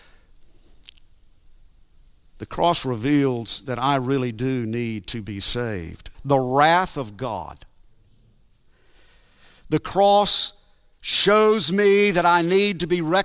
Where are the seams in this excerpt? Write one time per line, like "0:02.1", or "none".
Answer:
0:06.1